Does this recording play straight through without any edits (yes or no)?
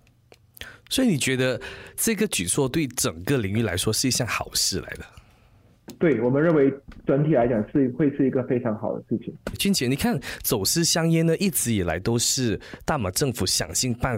yes